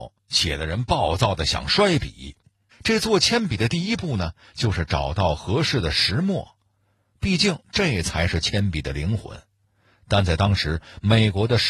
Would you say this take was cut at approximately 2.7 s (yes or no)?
yes